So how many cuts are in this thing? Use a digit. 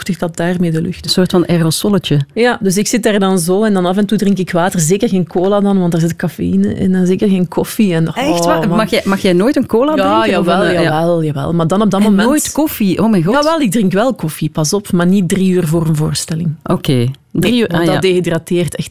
0